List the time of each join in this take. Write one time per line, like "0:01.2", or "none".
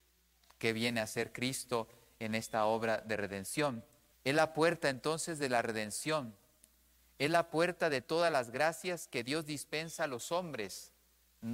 0:04.1